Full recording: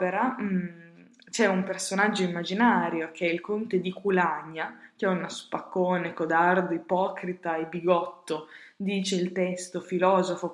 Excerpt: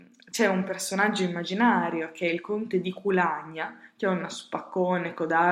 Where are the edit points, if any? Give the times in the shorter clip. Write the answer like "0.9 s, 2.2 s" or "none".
none